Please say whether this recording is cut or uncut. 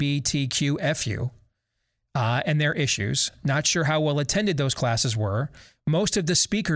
uncut